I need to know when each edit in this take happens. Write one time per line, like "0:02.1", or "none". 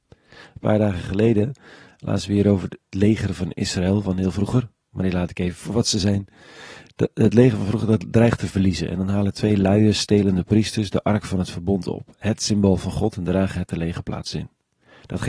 0:04.9